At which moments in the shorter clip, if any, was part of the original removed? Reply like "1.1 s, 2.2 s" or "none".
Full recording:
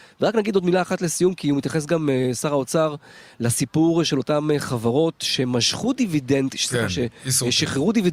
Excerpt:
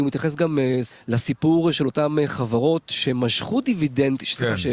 0.9 s